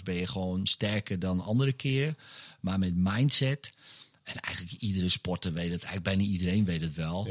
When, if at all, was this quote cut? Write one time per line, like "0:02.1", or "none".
none